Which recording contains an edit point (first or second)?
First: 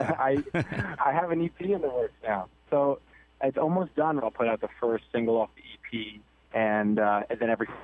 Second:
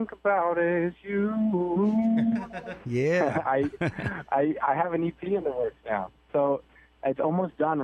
first